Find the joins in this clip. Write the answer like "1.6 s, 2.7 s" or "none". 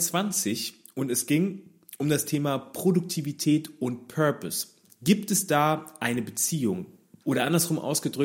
7.2 s